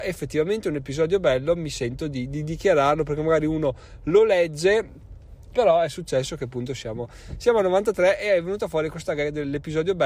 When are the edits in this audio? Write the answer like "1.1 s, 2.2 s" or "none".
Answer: 5.5 s